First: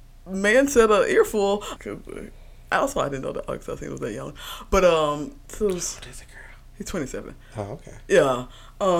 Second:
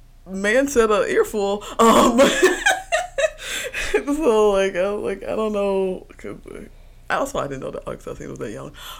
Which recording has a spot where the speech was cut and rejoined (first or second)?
first